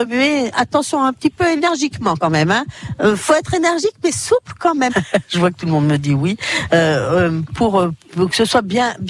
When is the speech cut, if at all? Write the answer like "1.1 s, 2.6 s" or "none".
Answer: 4.9 s